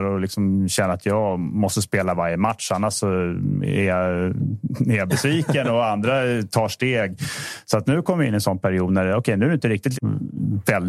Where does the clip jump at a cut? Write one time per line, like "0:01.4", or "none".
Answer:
0:07.8
0:09.9